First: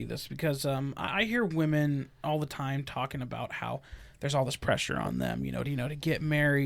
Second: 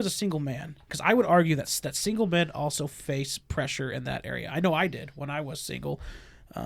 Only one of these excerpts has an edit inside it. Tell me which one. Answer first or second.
first